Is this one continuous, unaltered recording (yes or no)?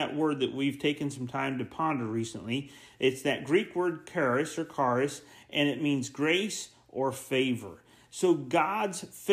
yes